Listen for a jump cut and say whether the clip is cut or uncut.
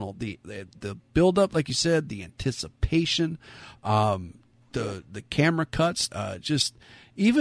cut